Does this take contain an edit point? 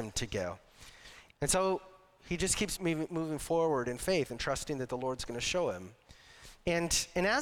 yes; 2 cuts; at 1.3 s, 2.8 s

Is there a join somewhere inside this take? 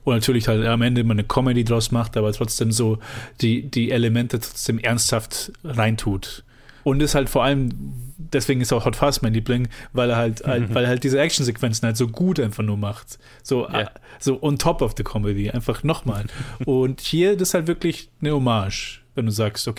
no; 0 cuts

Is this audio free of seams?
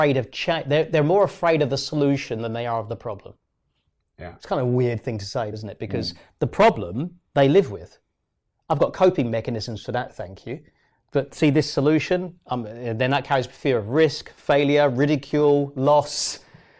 no; 1 cut; at 5.5 s

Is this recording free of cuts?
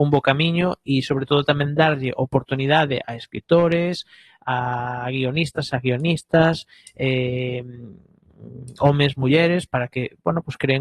yes; 0 cuts

